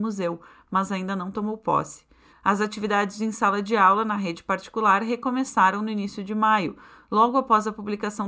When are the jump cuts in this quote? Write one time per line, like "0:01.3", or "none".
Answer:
0:02.3